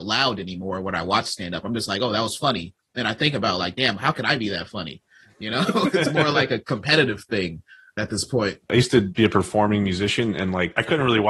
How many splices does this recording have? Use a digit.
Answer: 0